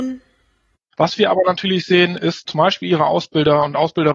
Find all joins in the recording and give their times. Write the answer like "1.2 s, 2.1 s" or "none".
0.9 s, 2.5 s